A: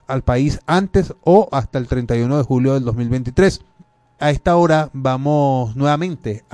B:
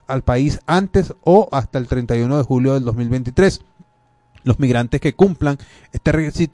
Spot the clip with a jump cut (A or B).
A